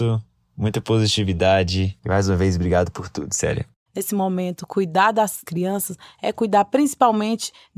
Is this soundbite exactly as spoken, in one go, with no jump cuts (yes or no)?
no